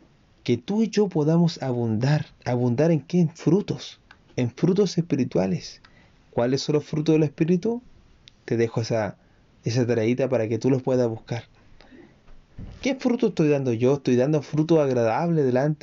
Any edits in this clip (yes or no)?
yes